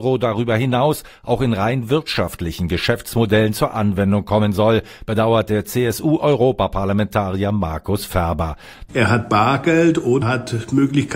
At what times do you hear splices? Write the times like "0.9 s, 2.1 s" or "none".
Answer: 8.9 s, 10.2 s